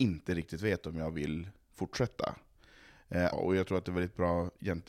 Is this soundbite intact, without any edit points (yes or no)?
no